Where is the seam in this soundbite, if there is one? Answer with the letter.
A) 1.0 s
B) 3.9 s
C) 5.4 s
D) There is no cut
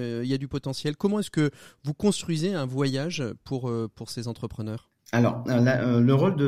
B